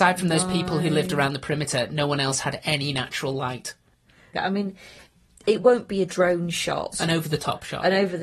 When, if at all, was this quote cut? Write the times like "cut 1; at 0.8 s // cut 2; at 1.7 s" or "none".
cut 1; at 4.3 s // cut 2; at 6.9 s